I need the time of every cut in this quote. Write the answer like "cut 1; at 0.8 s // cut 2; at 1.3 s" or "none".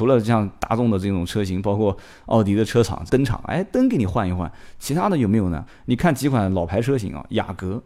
cut 1; at 3.1 s // cut 2; at 5.7 s